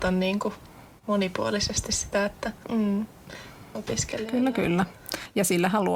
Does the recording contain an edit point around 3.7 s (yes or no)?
yes